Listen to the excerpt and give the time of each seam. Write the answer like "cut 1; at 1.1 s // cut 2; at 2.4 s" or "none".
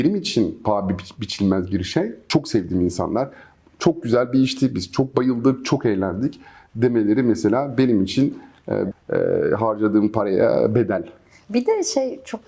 cut 1; at 8.9 s